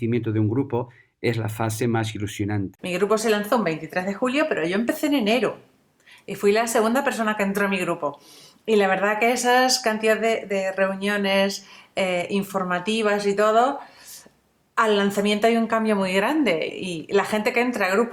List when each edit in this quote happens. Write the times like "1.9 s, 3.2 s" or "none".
2.8 s, 16.7 s